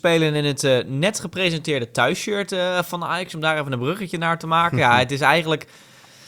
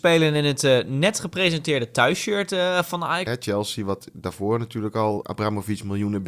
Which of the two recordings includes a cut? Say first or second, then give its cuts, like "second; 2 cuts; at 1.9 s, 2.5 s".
second; 2 cuts; at 3.3 s, 5.2 s